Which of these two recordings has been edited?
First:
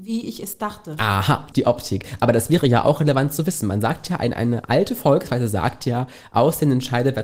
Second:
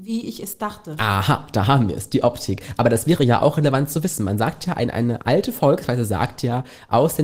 first; 1 cut; at 1.5 s

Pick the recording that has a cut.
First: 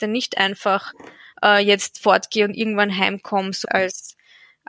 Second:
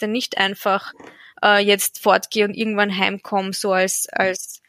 first; 1 cut; at 3.6 s

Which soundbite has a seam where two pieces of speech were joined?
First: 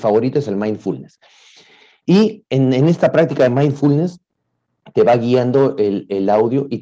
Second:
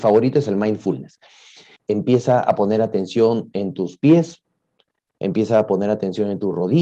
second; 1 cut; at 1.8 s

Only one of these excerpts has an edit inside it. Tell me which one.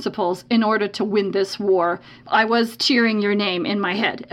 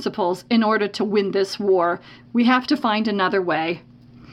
first; 1 cut; at 2.2 s

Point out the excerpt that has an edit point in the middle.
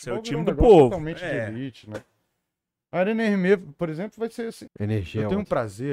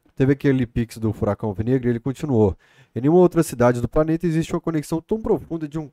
first; 1 cut; at 4.7 s

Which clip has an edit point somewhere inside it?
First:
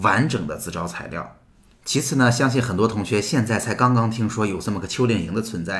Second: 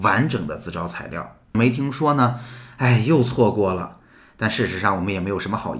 second; 1 cut; at 1.5 s

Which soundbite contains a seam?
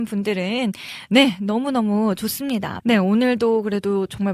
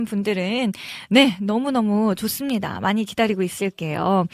first; 1 cut; at 2.8 s

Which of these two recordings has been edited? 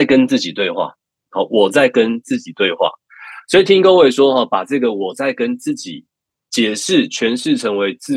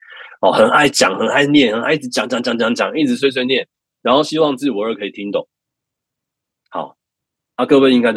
first; 1 cut; at 1.3 s

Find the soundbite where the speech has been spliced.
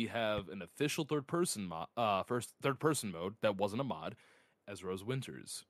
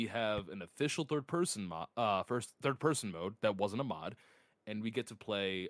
first; 1 cut; at 4.6 s

